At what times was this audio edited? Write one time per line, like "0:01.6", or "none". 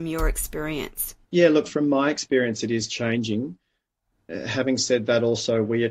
0:01.2